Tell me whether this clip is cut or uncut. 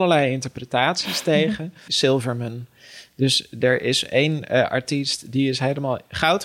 cut